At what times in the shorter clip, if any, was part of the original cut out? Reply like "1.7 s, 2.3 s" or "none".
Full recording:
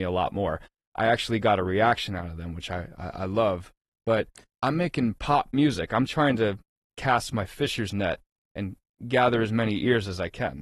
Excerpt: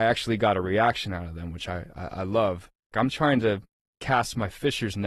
2.9 s